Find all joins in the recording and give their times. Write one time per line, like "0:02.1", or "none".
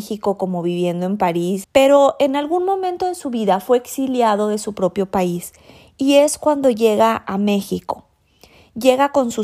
0:01.6